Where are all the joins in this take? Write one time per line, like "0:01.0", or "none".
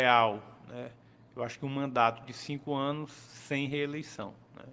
none